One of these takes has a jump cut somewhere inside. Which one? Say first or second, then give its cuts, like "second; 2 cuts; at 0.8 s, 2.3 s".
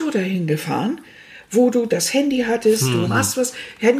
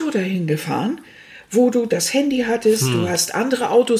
first; 1 cut; at 3.0 s